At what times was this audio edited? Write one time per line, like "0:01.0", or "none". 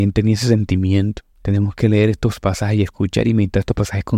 0:01.3